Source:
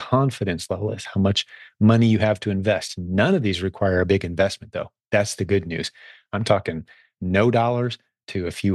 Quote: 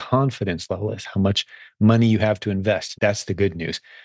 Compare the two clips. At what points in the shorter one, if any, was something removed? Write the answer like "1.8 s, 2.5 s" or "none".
2.9 s